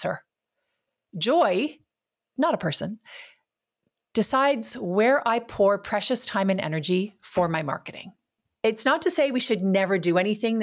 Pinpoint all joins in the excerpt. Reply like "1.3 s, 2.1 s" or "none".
2.2 s, 8.5 s